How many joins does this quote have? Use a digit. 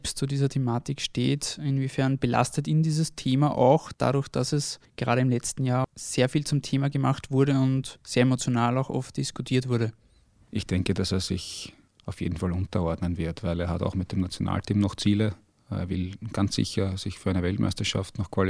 0